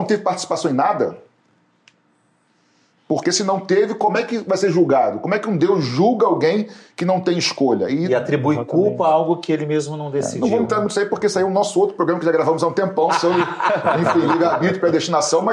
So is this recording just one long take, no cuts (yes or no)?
yes